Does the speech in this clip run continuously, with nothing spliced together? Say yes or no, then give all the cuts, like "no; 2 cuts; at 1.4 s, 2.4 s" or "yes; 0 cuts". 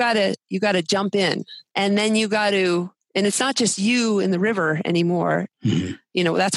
no; 2 cuts; at 1.7 s, 5.5 s